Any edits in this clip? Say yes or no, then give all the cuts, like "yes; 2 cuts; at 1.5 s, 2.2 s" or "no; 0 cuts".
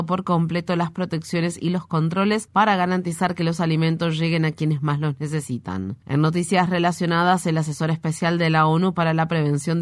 no; 0 cuts